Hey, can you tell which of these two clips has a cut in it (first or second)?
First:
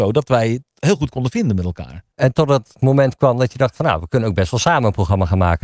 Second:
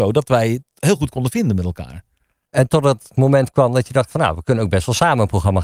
first